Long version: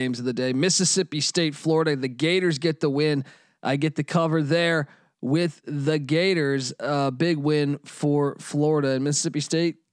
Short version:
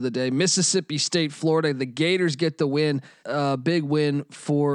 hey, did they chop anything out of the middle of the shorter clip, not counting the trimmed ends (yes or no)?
yes